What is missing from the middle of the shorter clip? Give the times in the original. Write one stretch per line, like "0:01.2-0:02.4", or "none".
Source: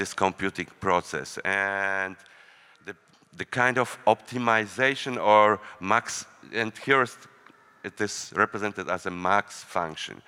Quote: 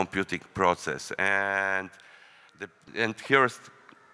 0:03.1-0:06.5